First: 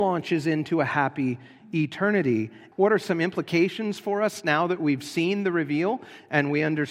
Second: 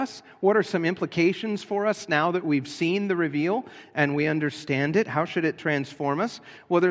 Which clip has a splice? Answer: first; 1 cut; at 2.7 s

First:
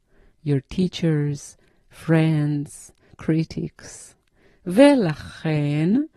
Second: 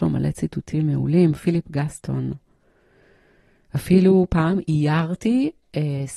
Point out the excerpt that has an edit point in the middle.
first; 2 cuts; at 3.1 s, 4.5 s

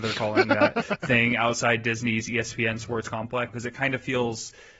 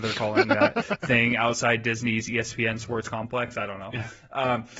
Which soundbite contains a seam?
first; 1 cut; at 3.5 s

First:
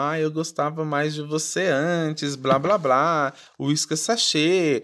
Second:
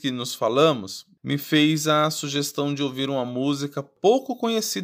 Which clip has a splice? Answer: second; 1 cut; at 1.2 s

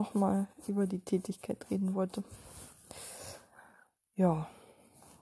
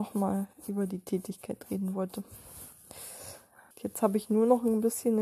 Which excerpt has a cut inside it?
second; 1 cut; at 3.7 s

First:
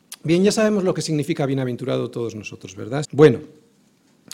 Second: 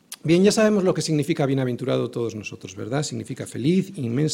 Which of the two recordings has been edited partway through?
first; 1 cut; at 3.0 s

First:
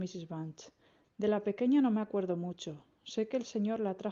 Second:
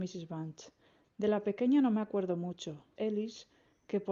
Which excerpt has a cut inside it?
second; 1 cut; at 3.0 s

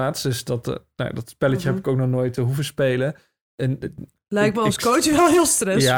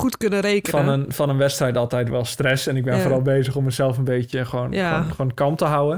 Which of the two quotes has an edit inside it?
second; 1 cut; at 2.1 s

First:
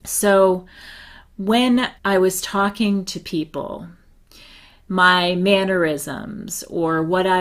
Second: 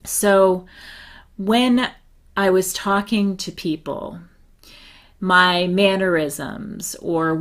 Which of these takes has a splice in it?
first; 1 cut; at 2.0 s

